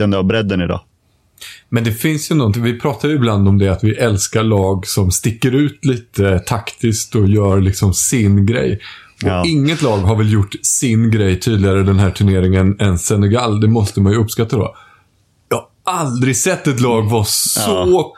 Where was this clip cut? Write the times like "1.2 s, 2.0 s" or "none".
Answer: none